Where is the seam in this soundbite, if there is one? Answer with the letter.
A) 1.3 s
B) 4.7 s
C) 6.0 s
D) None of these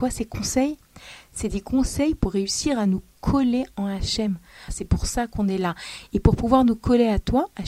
B